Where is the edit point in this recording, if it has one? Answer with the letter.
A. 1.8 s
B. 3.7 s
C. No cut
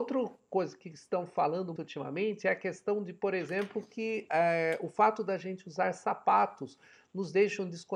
A